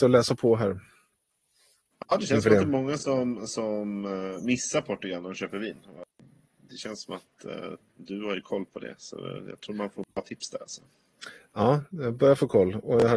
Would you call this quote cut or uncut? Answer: uncut